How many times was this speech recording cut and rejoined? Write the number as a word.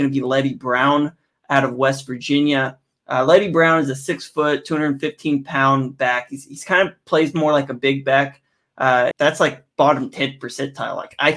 one